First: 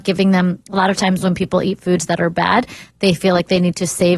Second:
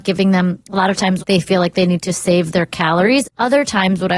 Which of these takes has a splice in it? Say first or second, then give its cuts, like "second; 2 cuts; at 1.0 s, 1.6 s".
second; 2 cuts; at 1.2 s, 3.2 s